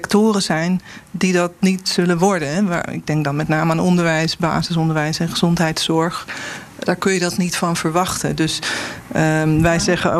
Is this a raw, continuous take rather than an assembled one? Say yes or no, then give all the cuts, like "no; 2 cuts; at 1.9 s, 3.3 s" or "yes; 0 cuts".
yes; 0 cuts